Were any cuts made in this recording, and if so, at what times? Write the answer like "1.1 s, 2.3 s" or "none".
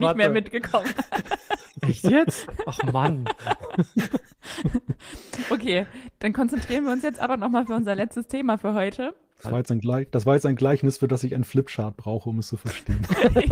9.4 s